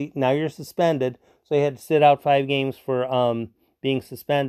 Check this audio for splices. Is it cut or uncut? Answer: uncut